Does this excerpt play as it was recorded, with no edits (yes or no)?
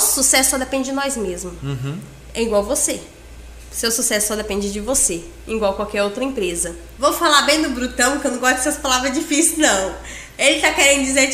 no